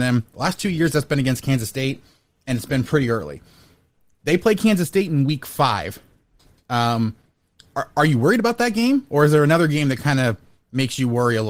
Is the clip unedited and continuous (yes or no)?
yes